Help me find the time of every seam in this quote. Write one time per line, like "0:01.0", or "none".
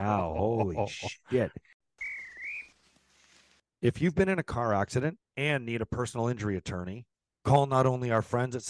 none